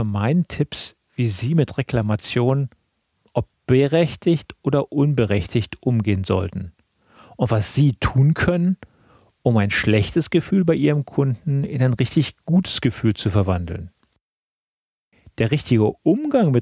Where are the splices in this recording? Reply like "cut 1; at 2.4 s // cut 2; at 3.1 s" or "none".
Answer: none